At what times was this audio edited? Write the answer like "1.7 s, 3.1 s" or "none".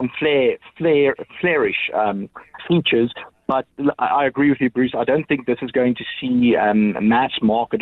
2.6 s